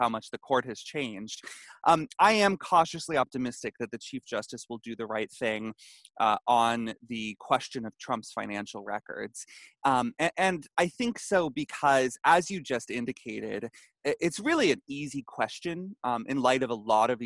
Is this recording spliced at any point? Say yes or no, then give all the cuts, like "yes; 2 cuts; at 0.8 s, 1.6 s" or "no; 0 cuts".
no; 0 cuts